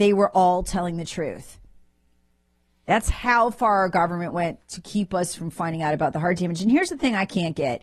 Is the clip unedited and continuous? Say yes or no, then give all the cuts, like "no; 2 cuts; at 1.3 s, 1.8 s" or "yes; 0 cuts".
yes; 0 cuts